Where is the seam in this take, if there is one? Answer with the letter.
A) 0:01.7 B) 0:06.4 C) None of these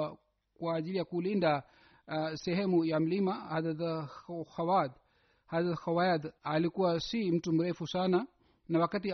B